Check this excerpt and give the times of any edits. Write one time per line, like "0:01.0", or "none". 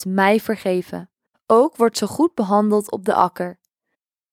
0:01.3